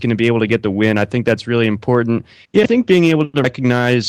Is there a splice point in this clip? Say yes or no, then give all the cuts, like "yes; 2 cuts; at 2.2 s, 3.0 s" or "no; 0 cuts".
yes; 1 cut; at 2.4 s